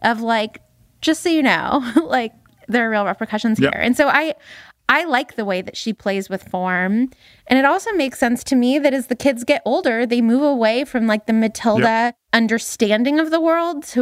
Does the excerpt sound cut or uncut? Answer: uncut